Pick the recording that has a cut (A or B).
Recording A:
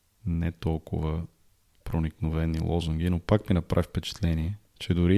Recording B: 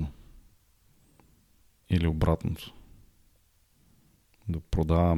B